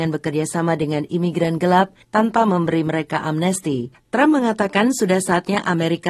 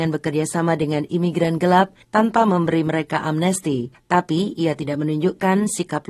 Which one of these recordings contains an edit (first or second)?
first